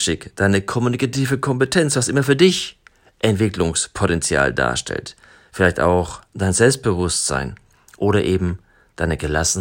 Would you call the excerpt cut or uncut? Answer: uncut